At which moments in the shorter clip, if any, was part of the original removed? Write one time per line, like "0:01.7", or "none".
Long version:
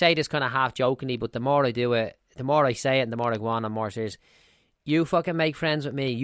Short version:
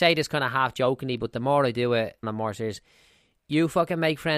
0:02.2